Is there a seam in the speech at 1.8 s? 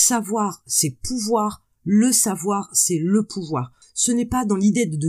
no; 1 cut; at 3.8 s

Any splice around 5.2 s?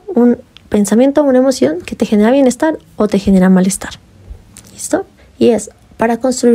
yes; 1 cut; at 5.2 s

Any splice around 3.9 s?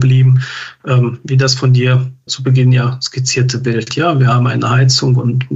no; 1 cut; at 2.3 s

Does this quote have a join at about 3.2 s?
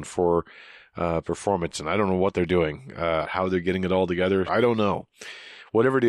yes; 2 cuts; at 3.2 s, 4.5 s

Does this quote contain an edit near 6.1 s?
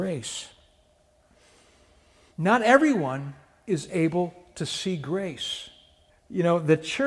yes; 1 cut; at 6.1 s

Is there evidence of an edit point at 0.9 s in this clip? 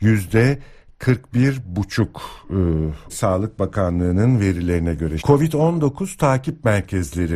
no; 2 cuts; at 3.1 s, 5.2 s

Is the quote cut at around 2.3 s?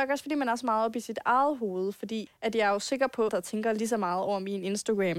yes; 2 cuts; at 2.3 s, 3.3 s

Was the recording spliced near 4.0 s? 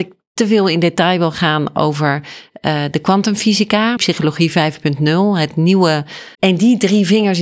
yes; 2 cuts; at 4.0 s, 6.3 s

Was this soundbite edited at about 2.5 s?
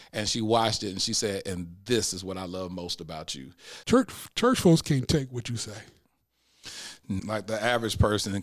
no; 2 cuts; at 3.8 s, 7.2 s

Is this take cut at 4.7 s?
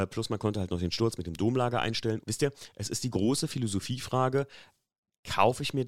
no; 1 cut; at 2.2 s

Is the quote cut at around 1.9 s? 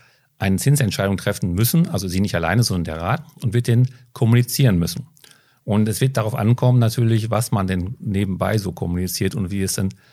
no; 0 cuts

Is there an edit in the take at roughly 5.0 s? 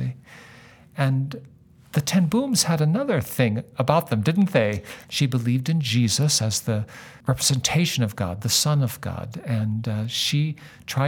yes; 1 cut; at 5.0 s

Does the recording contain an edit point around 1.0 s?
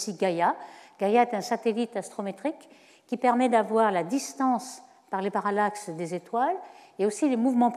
no; 0 cuts

